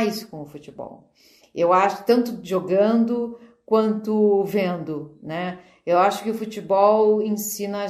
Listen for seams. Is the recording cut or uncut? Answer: uncut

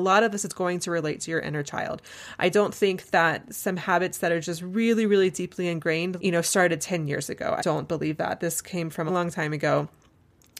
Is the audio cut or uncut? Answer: cut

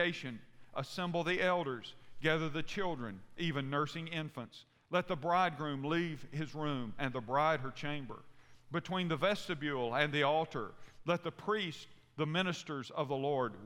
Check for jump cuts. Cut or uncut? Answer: uncut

